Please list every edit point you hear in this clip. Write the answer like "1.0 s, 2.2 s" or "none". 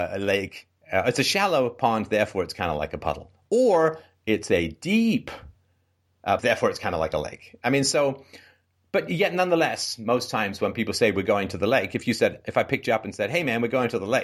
6.4 s